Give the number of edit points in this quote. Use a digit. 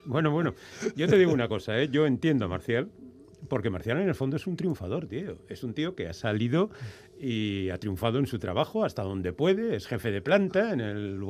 0